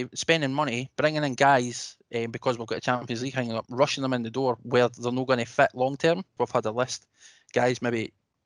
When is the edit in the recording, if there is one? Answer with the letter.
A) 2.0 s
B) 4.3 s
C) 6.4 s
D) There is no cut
C